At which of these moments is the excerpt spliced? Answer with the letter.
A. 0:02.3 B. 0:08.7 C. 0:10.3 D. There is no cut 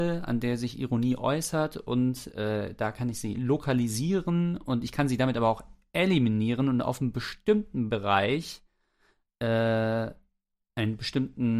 D